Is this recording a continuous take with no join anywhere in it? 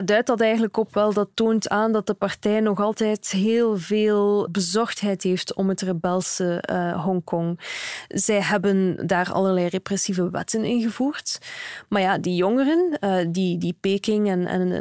yes; 0 cuts

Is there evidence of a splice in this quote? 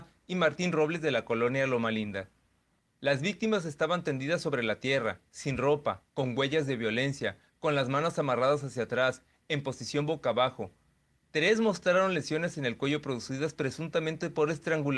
no; 0 cuts

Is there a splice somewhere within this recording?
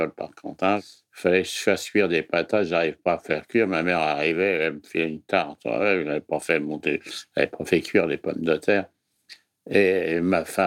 no; 0 cuts

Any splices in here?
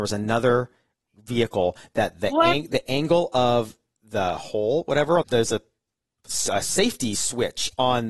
yes; 1 cut; at 5.2 s

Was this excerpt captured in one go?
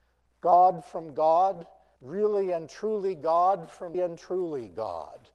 no; 2 cuts; at 2.0 s, 3.9 s

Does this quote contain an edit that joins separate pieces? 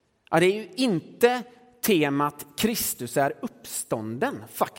no; 0 cuts

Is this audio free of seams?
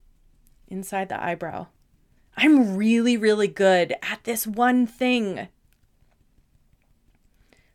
yes; 0 cuts

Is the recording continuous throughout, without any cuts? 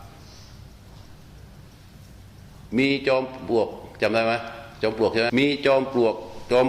no; 1 cut; at 5.3 s

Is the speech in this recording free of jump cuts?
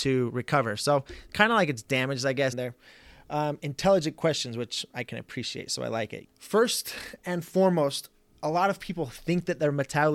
no; 2 cuts; at 2.5 s, 6.2 s

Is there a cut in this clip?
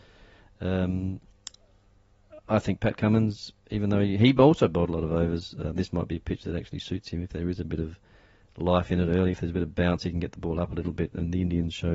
no; 0 cuts

